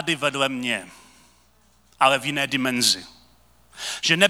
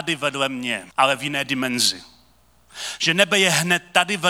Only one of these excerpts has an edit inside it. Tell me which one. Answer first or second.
second